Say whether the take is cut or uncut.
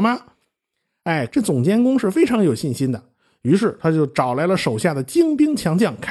cut